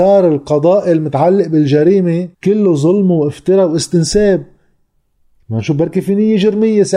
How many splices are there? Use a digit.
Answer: 1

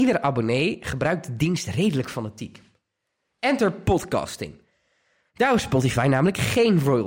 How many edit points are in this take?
0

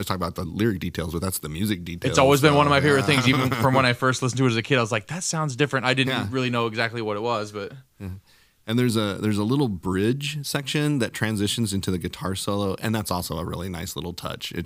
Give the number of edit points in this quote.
0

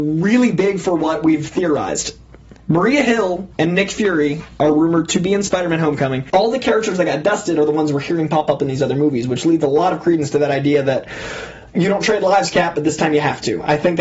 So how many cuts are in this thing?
1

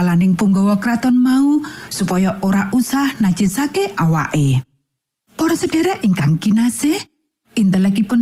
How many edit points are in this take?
0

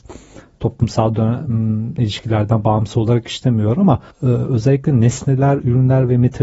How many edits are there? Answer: 2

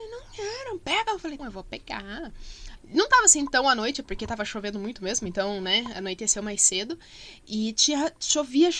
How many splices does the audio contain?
2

